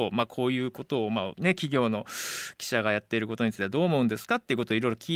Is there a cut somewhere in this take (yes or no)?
yes